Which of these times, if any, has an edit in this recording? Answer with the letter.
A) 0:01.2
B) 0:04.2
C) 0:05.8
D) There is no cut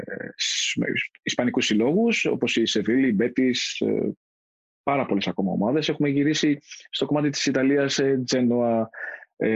D